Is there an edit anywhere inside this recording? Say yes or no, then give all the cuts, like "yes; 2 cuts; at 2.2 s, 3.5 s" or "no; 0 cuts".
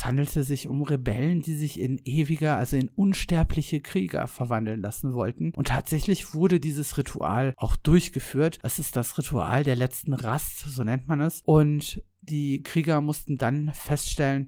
no; 0 cuts